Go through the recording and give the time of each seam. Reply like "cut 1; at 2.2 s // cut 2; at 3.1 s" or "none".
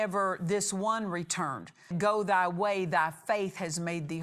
cut 1; at 1.9 s